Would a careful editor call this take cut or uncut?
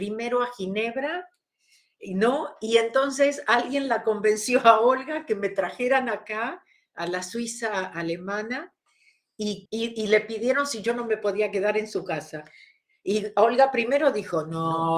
cut